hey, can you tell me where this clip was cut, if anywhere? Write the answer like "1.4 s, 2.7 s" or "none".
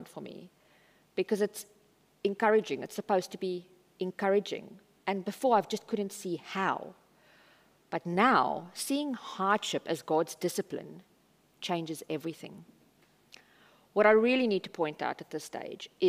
none